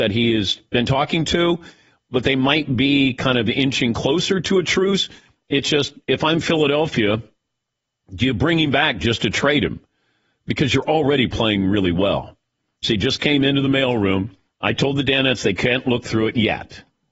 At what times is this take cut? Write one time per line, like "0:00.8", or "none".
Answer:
0:12.8
0:14.5